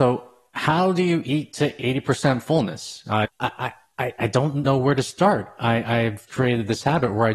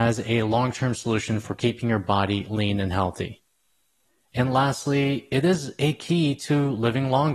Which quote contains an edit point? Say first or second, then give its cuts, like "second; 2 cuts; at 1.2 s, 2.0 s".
first; 3 cuts; at 3.2 s, 4.6 s, 6.3 s